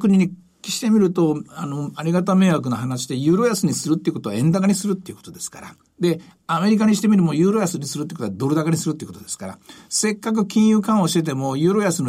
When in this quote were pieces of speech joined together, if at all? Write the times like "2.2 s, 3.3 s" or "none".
none